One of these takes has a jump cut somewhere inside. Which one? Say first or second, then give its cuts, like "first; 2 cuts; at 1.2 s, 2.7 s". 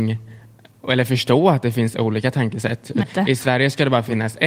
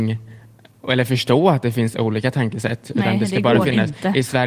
first; 1 cut; at 3.0 s